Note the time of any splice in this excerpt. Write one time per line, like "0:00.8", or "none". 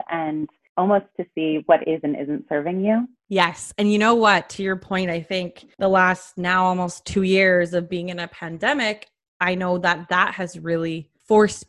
none